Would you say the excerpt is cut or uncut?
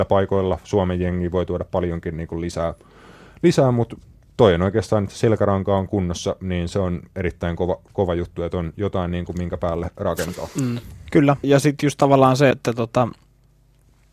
cut